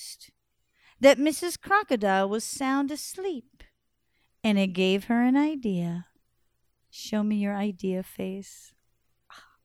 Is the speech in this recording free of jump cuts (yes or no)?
yes